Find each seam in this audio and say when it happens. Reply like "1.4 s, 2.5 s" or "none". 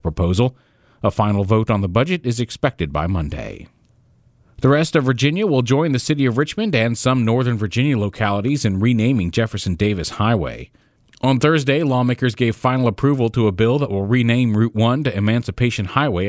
none